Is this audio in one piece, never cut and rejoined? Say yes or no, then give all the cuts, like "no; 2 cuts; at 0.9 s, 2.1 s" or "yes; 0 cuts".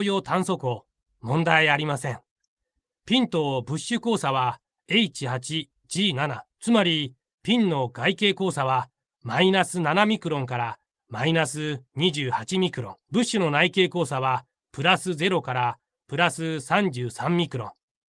no; 2 cuts; at 6.5 s, 13.0 s